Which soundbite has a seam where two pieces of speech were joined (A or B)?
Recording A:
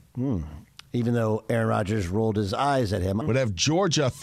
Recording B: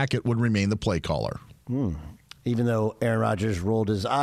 A